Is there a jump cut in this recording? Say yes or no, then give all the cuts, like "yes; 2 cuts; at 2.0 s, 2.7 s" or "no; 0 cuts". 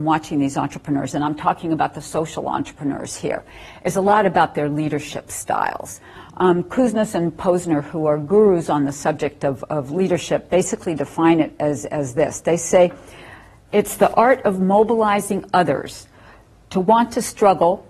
no; 0 cuts